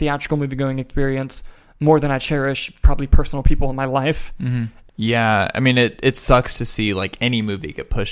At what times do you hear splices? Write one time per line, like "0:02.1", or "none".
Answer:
0:04.9